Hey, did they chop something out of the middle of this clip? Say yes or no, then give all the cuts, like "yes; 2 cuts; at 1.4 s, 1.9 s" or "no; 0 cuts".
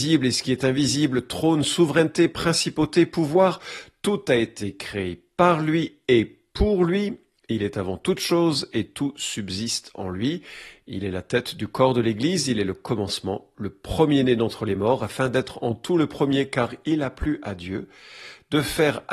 no; 0 cuts